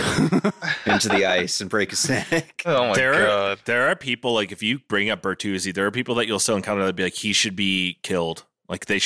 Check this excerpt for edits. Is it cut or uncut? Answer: uncut